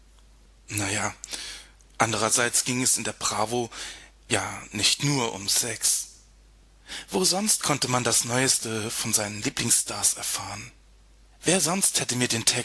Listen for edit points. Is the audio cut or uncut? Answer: uncut